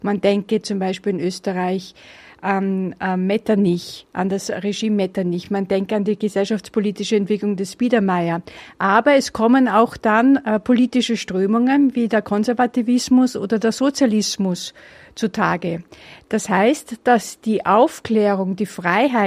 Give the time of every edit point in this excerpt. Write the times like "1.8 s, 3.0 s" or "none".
none